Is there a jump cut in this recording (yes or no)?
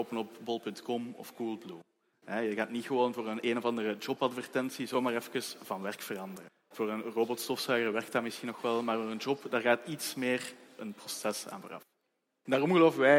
no